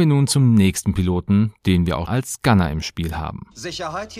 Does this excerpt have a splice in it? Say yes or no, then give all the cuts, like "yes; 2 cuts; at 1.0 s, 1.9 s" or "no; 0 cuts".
yes; 1 cut; at 2.1 s